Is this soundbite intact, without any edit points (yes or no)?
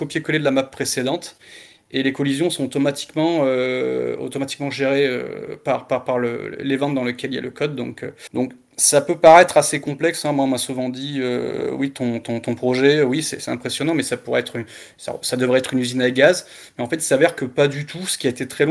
no